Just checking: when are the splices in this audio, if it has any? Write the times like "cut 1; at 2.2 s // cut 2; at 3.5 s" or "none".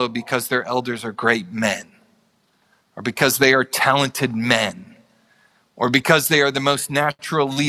none